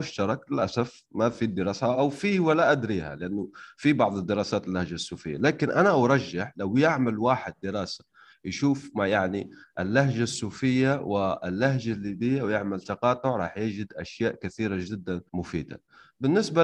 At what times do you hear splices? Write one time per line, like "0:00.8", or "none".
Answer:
0:01.9
0:15.3